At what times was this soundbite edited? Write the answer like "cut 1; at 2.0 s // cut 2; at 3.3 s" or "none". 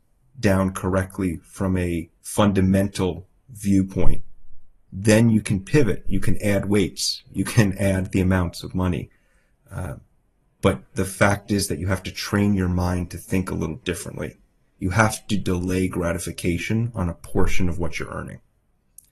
cut 1; at 2.2 s